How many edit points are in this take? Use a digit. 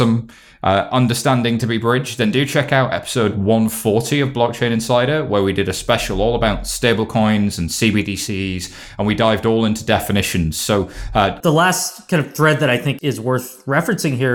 2